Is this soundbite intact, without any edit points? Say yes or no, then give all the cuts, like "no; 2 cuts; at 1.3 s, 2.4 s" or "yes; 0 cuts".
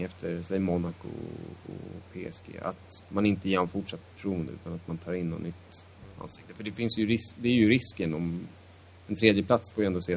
yes; 0 cuts